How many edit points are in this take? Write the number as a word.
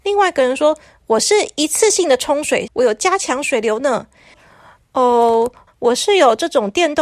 three